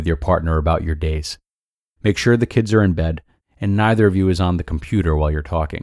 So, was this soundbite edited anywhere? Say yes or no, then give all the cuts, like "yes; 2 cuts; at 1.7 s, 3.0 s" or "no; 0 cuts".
yes; 1 cut; at 3.4 s